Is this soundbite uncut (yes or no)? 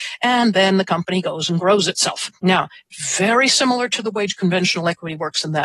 no